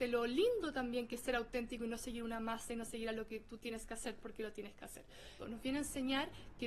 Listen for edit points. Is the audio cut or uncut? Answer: cut